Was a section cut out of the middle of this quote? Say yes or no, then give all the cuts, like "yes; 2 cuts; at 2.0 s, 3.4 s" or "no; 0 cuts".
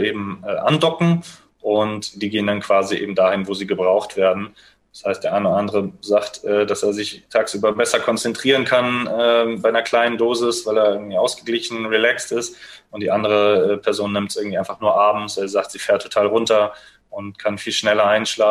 no; 0 cuts